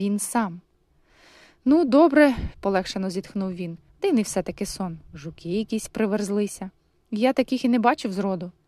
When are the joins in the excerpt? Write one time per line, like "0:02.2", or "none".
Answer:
0:02.5
0:03.9